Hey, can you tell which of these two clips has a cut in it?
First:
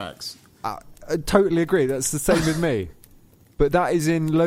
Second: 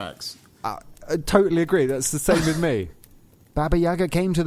second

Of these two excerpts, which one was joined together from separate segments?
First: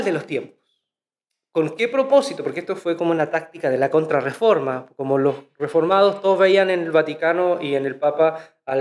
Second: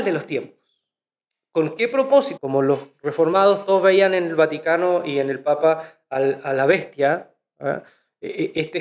second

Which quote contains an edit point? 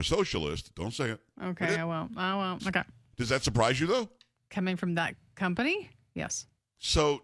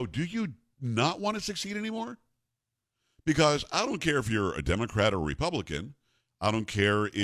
first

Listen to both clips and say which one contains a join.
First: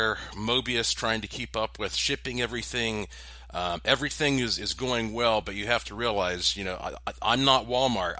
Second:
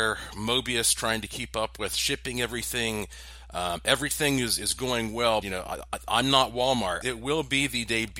second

